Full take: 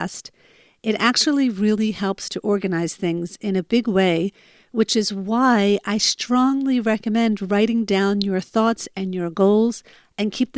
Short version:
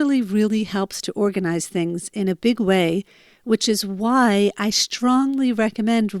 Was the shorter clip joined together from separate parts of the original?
no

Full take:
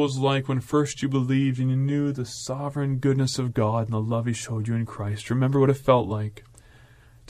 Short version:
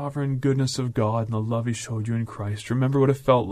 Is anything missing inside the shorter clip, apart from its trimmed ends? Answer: no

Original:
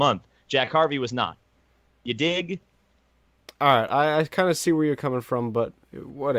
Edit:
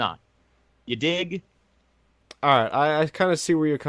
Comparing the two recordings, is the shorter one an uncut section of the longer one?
yes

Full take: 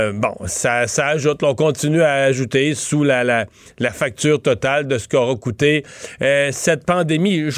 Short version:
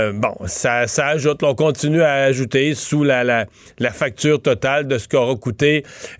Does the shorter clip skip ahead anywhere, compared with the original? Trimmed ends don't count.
no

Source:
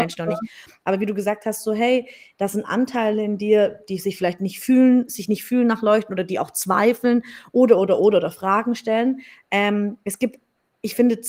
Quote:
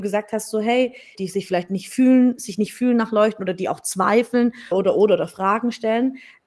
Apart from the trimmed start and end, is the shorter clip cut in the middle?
yes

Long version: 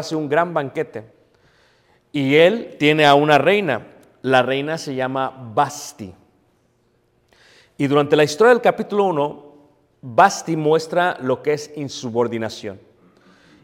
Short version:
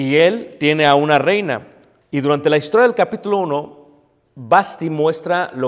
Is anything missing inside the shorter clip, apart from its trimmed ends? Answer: yes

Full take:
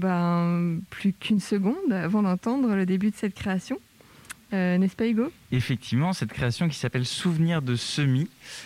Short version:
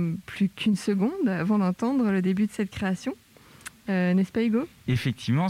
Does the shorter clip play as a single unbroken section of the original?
yes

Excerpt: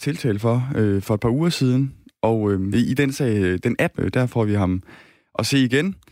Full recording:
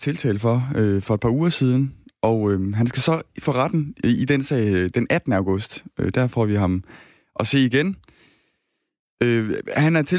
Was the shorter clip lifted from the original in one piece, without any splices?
no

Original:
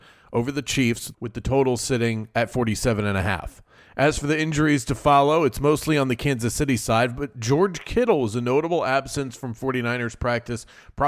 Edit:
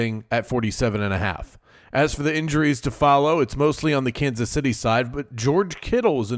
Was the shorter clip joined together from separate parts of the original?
no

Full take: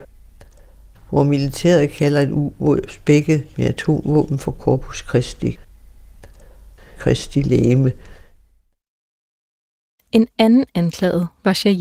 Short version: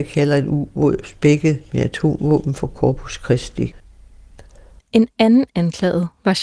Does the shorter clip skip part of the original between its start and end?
yes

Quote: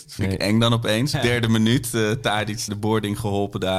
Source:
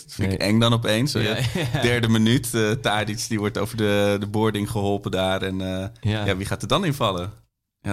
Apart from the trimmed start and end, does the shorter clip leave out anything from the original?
yes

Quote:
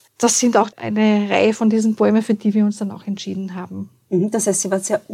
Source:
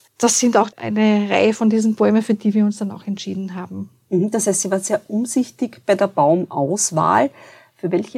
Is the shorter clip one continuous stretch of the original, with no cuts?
yes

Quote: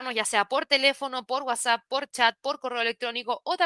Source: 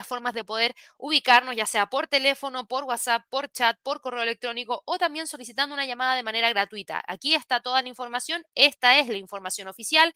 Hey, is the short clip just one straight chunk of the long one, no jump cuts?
yes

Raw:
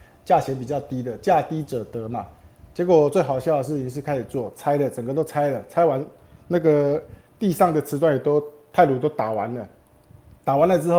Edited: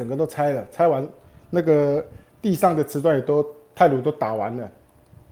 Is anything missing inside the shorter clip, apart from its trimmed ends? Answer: no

